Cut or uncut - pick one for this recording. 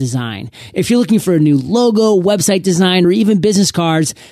uncut